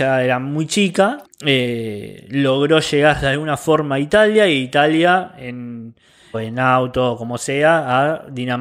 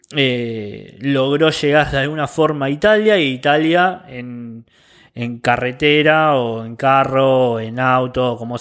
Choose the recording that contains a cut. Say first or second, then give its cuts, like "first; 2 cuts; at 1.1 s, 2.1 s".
first; 2 cuts; at 1.2 s, 6.3 s